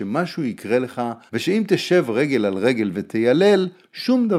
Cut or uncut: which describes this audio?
cut